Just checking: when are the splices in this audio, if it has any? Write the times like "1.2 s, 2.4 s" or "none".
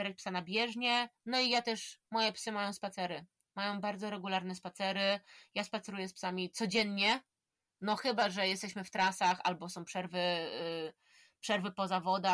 none